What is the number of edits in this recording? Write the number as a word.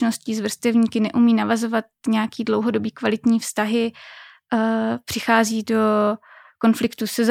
zero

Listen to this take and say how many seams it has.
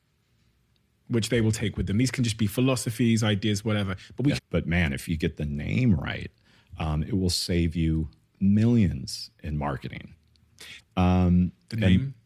two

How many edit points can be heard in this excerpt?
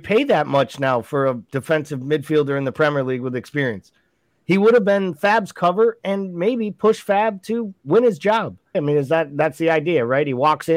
one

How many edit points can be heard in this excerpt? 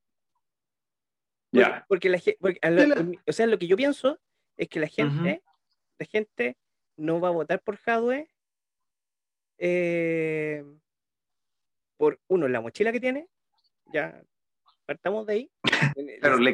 one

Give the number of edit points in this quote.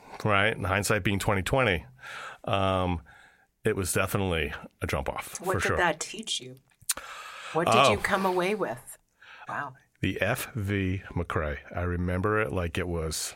one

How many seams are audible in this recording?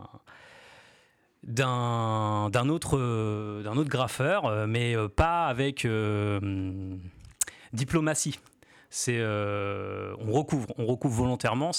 zero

